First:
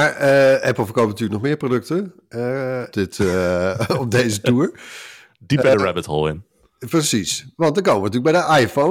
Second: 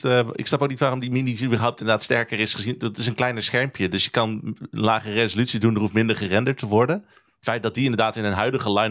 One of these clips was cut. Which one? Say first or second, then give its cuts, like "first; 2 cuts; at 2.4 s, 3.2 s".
first; 1 cut; at 2.9 s